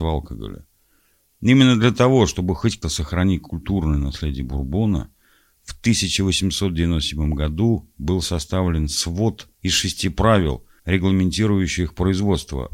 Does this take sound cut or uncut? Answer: cut